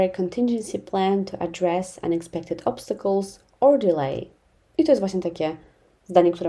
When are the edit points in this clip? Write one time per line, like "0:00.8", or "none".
0:04.6